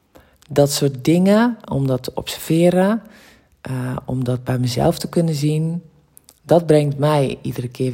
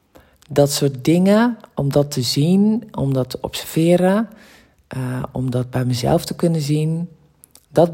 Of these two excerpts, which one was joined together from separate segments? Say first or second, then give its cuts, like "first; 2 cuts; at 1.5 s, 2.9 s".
first; 1 cut; at 1.6 s